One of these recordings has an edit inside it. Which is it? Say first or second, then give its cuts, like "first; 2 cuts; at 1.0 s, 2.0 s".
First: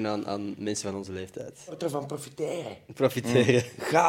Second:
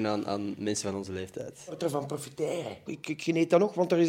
second; 1 cut; at 2.9 s